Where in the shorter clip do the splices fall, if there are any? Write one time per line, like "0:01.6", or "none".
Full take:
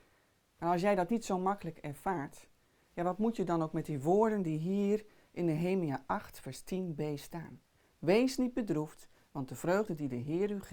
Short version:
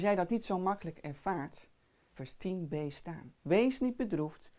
0:02.2
0:03.4